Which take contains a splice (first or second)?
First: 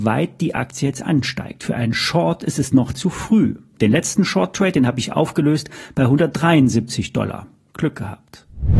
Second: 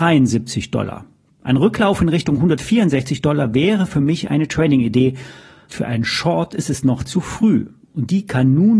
second